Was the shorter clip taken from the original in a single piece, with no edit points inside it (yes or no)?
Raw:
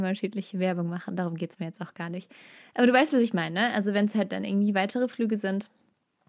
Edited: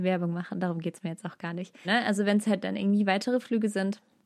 no